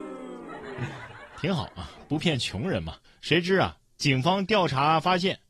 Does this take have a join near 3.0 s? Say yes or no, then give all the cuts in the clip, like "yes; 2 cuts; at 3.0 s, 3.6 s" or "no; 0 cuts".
yes; 1 cut; at 3.0 s